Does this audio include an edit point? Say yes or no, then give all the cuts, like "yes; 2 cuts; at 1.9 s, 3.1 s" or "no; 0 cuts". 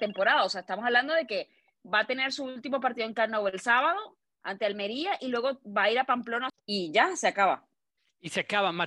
yes; 1 cut; at 6.5 s